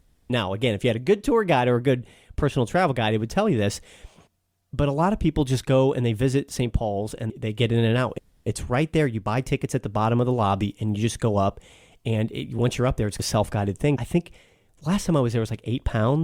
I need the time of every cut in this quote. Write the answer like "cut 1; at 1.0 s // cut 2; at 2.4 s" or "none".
none